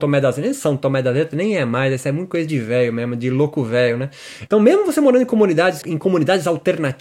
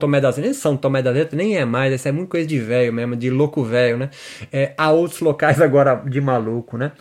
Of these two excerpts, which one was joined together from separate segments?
first; 2 cuts; at 4.5 s, 5.8 s

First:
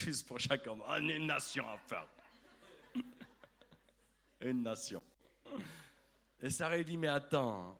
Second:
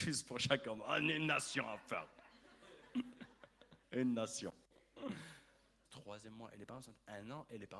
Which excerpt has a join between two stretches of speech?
second; 2 cuts; at 3.8 s, 5.9 s

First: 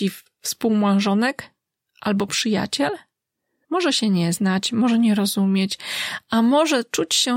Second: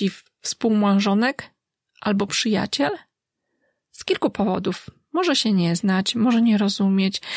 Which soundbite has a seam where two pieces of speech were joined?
first; 1 cut; at 3.6 s

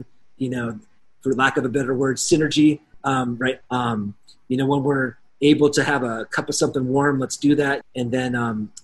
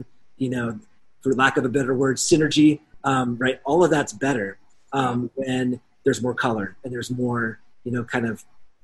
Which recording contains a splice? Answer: first; 2 cuts; at 3.6 s, 7.8 s

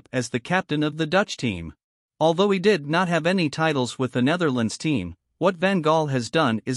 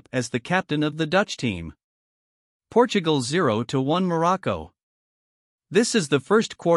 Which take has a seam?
first; 1 cut; at 2.0 s

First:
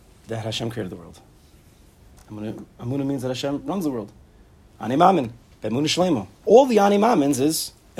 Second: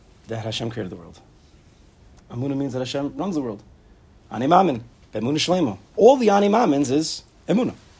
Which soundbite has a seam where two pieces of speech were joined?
second; 1 cut; at 2.2 s

